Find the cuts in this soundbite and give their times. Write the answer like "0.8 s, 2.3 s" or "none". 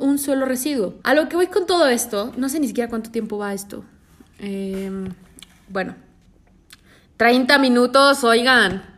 1.0 s